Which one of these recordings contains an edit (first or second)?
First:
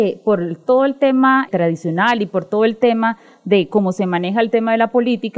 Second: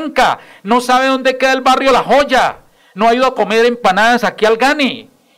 first